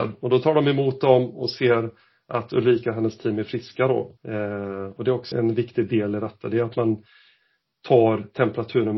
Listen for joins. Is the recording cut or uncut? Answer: cut